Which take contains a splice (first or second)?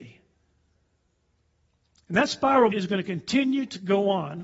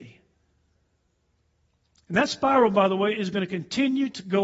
first